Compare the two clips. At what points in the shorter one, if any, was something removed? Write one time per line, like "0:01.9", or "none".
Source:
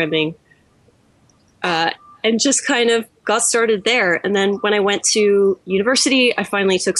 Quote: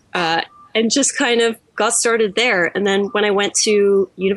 none

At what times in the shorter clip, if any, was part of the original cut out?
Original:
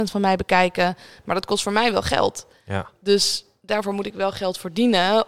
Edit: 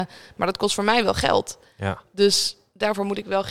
none

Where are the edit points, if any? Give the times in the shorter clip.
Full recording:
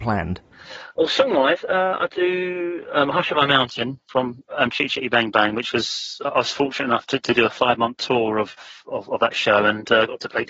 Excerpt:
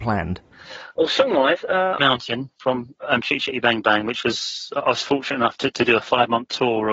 0:02.0

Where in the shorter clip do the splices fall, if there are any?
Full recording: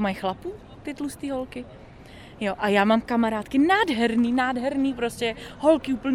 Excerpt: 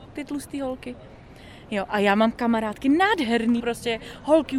0:03.6

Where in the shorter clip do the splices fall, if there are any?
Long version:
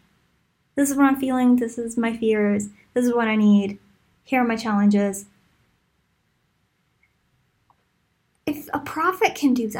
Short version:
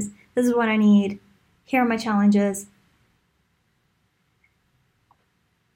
none

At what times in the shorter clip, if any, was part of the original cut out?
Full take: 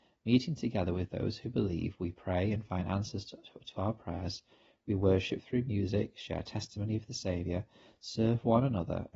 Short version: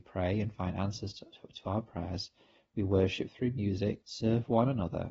0:04.0

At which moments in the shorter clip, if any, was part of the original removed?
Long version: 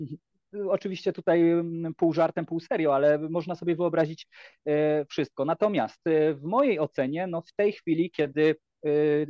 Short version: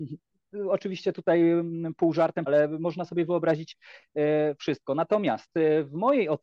0:02.5

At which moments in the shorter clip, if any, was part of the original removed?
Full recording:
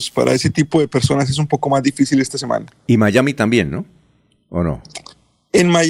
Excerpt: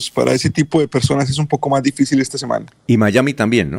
none

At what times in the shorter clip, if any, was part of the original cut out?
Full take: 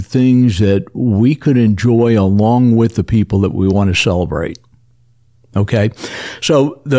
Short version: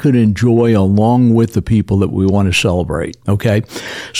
0:03.2

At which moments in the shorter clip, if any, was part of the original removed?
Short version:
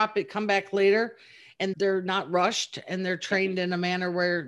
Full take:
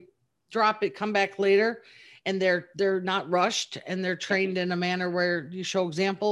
0:01.7

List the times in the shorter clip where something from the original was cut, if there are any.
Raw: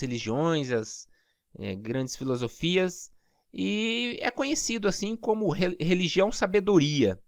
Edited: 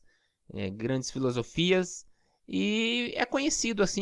none

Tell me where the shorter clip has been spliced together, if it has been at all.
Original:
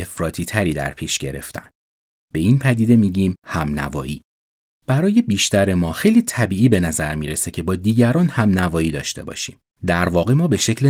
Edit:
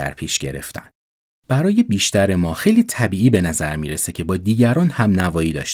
0:01.4

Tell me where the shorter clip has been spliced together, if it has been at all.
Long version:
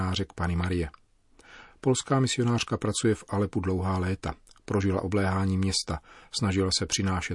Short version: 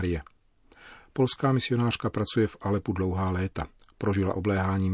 none

